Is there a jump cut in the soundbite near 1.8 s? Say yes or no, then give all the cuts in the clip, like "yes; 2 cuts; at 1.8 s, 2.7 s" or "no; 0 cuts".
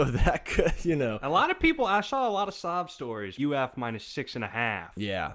no; 1 cut; at 3.4 s